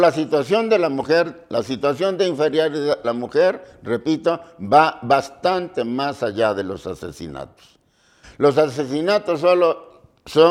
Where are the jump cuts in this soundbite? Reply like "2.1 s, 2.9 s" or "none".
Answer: 3.0 s, 8.2 s